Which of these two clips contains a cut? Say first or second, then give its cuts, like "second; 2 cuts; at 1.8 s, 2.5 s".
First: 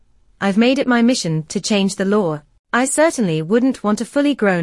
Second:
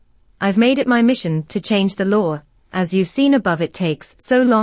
first; 1 cut; at 2.6 s